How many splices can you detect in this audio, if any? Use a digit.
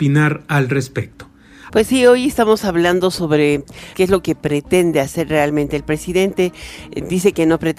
2